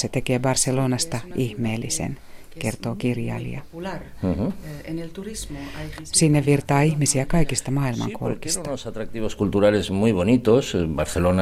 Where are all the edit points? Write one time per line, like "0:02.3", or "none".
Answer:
0:06.0